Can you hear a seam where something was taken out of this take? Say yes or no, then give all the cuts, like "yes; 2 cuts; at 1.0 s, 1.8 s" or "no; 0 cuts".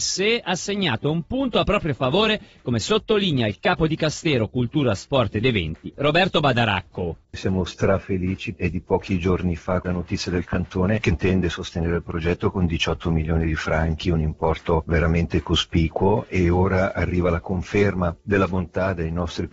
yes; 1 cut; at 7.2 s